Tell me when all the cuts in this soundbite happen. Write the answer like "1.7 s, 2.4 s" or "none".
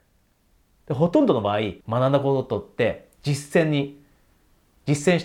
1.8 s